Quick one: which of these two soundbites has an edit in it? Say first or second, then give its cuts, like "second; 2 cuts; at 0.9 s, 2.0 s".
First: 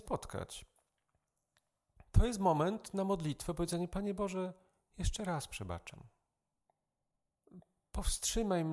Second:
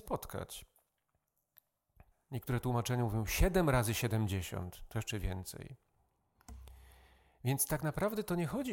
second; 1 cut; at 2.1 s